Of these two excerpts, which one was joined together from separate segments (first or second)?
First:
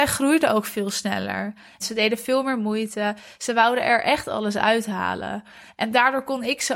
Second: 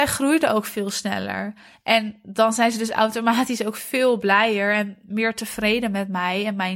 first